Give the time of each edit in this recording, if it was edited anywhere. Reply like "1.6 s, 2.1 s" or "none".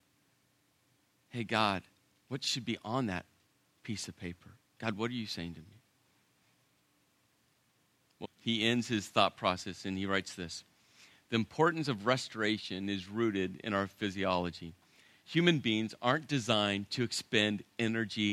8.2 s